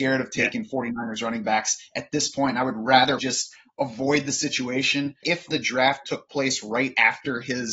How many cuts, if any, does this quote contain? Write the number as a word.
two